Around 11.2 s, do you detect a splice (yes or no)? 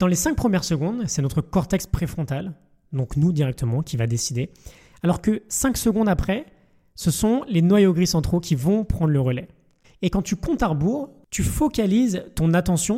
yes